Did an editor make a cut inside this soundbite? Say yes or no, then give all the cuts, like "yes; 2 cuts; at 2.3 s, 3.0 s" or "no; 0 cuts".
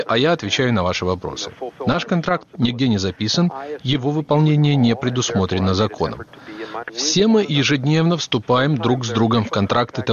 yes; 1 cut; at 6.8 s